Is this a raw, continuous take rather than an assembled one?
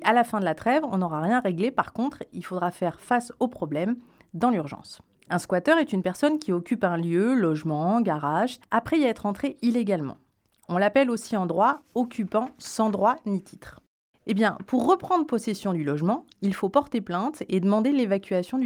no; 2 cuts; at 5.1 s, 8.6 s

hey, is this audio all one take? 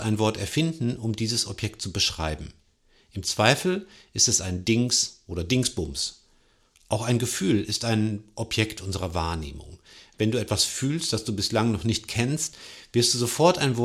yes; 0 cuts

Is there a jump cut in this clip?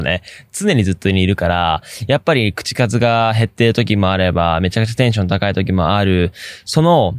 no; 0 cuts

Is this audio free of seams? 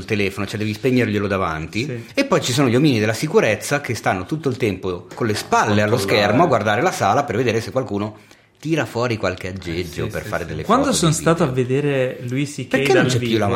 yes; 0 cuts

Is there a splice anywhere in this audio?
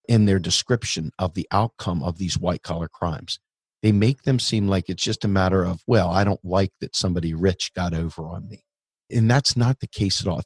no; 0 cuts

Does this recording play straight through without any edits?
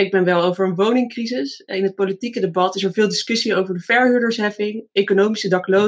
yes; 0 cuts

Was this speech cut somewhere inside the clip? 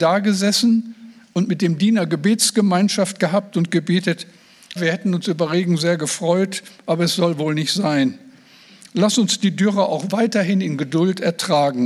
yes; 1 cut; at 4.8 s

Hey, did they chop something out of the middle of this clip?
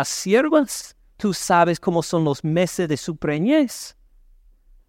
yes; 1 cut; at 1.1 s

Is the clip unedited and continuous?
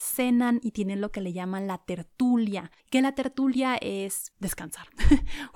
no; 2 cuts; at 2.8 s, 4.3 s

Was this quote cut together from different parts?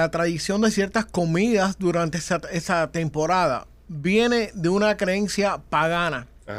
no; 0 cuts

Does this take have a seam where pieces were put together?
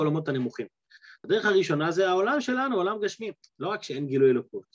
yes; 2 cuts; at 1.2 s, 3.4 s

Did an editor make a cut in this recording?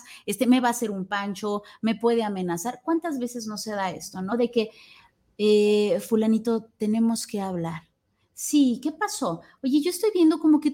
no; 0 cuts

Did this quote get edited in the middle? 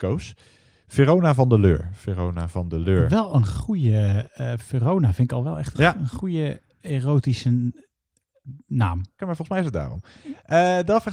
yes; 2 cuts; at 5.7 s, 9.2 s

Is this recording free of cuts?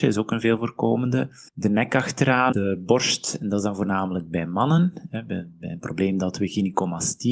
no; 2 cuts; at 1.5 s, 2.5 s

